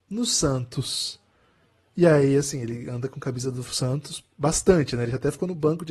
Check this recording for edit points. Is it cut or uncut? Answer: uncut